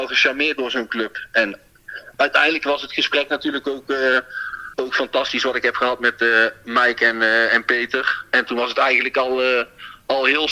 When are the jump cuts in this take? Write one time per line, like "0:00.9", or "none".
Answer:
0:04.7